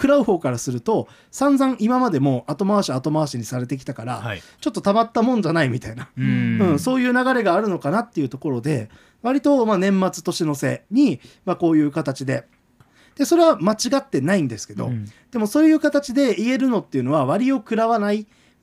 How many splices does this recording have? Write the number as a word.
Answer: one